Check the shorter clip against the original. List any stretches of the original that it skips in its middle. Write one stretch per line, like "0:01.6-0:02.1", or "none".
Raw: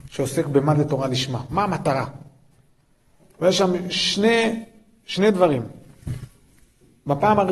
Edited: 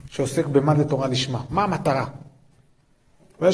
none